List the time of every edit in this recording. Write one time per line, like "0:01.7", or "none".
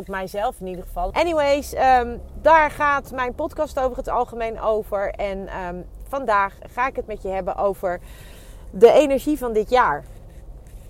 0:01.1